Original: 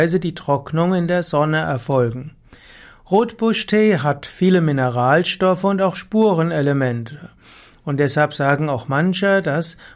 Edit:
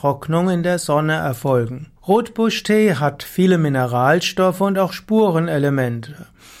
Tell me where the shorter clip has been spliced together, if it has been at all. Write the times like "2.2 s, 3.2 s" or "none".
2.0 s